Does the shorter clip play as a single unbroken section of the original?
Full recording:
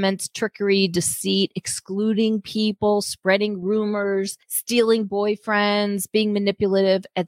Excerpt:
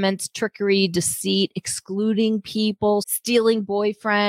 no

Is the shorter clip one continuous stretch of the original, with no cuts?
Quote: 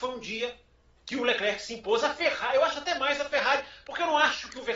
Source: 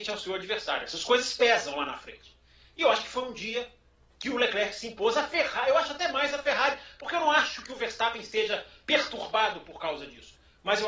yes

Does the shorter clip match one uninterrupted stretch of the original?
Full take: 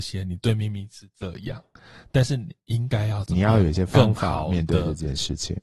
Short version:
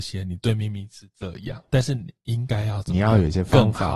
no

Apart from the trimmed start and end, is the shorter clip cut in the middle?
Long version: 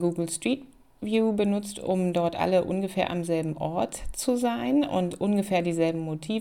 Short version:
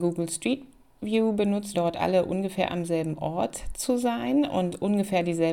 yes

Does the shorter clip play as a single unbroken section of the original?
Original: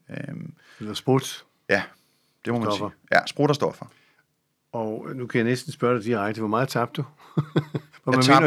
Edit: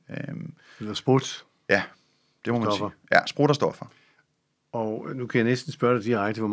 yes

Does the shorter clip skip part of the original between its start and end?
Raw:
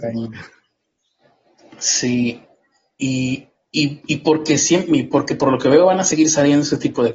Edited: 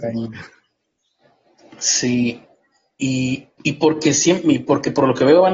yes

